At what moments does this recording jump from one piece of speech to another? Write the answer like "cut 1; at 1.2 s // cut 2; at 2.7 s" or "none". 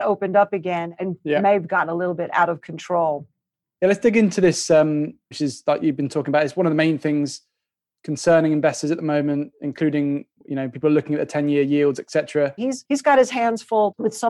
cut 1; at 5.3 s // cut 2; at 12.6 s